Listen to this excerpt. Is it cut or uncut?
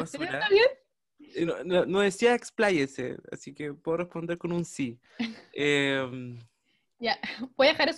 uncut